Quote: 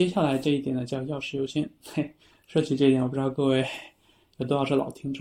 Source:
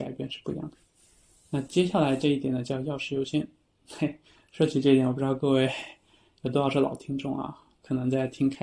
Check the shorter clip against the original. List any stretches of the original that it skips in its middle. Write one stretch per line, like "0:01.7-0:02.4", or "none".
0:03.5-0:03.8